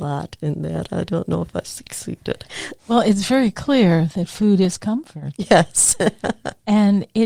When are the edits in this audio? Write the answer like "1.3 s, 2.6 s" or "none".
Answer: 2.8 s